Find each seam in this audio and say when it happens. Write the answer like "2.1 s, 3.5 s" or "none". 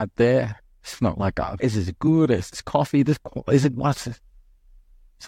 1.6 s